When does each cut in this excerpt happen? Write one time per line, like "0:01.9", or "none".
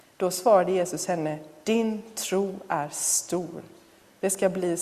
0:01.6